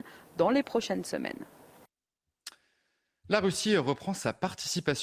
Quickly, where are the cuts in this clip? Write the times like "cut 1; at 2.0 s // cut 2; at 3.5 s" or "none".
none